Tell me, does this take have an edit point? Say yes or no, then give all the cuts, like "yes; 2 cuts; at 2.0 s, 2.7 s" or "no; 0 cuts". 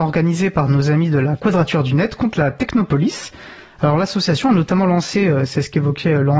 no; 0 cuts